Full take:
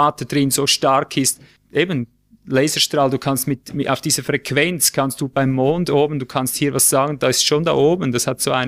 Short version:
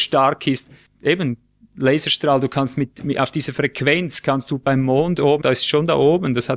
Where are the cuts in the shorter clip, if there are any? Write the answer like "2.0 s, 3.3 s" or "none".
5.4 s